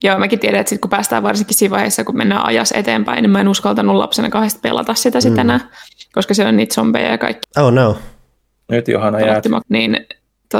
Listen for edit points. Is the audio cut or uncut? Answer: cut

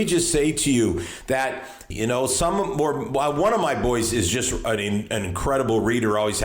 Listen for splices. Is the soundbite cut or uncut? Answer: cut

